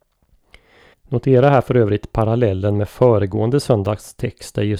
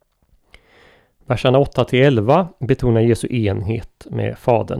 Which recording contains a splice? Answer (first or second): first